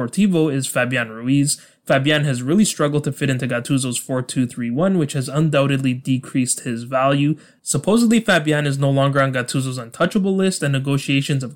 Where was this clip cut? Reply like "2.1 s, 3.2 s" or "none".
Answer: none